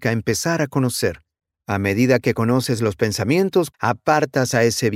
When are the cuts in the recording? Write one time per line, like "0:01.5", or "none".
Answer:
0:03.7